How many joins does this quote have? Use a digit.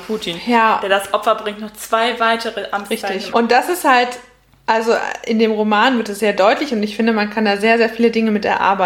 1